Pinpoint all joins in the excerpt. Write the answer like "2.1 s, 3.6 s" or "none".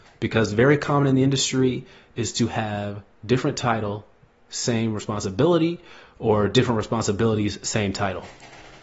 none